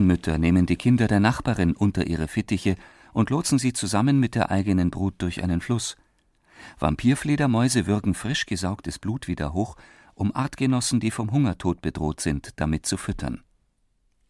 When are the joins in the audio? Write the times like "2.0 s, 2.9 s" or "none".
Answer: none